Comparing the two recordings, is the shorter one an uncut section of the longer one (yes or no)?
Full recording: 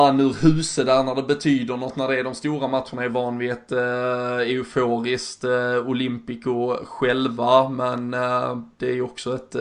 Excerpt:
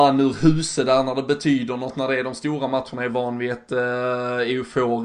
yes